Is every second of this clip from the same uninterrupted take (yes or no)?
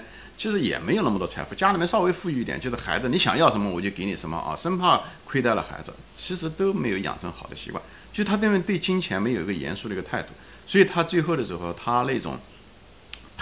yes